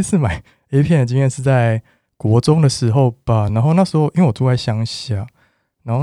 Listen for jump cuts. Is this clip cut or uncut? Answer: uncut